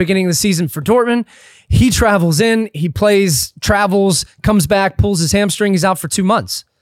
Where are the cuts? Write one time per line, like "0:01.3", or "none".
none